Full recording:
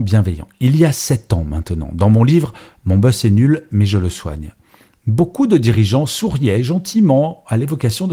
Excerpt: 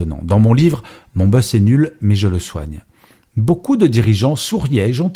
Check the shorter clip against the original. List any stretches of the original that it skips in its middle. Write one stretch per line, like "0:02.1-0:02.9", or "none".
none